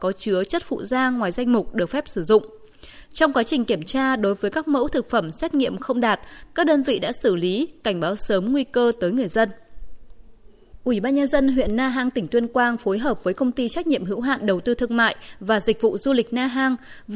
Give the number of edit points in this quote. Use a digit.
0